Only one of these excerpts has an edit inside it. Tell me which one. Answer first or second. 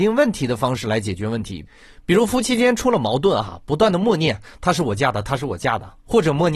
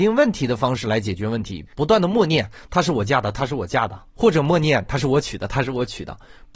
second